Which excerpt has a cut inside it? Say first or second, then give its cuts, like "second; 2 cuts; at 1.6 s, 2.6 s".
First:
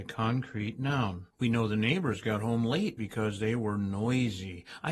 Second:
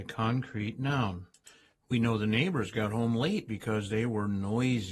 first; 1 cut; at 1.3 s